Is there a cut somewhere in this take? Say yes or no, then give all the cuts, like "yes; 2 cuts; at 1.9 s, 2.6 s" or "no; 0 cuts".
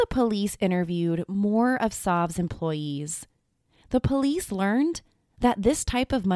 no; 0 cuts